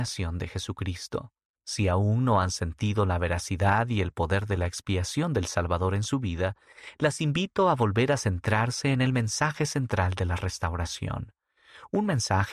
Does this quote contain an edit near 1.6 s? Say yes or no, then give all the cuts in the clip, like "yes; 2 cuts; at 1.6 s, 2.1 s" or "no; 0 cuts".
yes; 1 cut; at 1.6 s